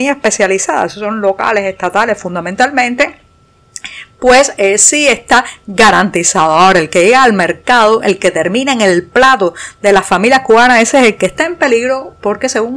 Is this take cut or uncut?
uncut